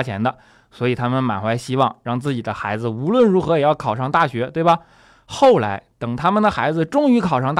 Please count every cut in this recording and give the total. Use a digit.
0